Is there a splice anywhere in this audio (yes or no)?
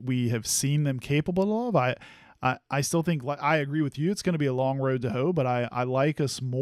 no